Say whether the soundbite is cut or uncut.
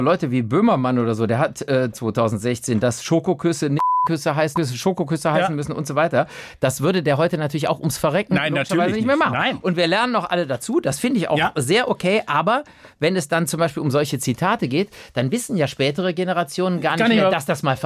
cut